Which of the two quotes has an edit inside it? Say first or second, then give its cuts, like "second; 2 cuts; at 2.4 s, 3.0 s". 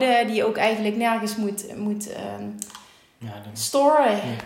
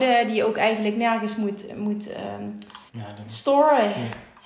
second; 1 cut; at 2.9 s